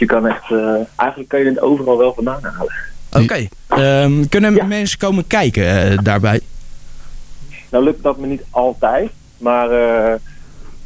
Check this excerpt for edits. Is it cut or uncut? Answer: cut